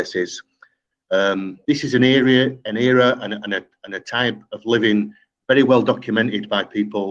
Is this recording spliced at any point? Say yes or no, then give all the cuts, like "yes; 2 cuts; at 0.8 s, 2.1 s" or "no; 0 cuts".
yes; 1 cut; at 0.9 s